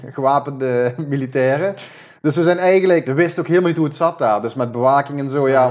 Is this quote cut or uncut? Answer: cut